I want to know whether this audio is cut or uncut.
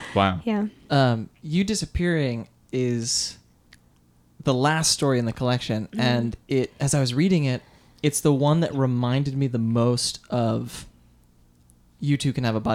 uncut